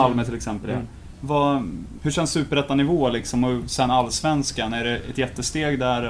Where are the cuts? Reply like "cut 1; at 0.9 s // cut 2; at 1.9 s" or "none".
cut 1; at 2.0 s